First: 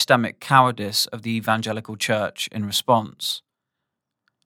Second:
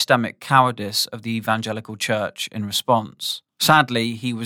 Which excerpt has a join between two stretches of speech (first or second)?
second